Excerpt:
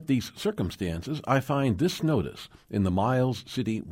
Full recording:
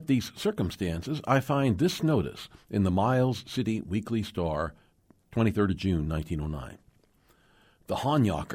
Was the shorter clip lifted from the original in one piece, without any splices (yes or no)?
yes